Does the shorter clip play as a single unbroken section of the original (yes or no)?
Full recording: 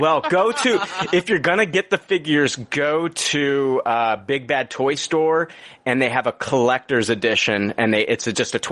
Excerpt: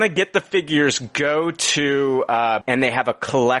no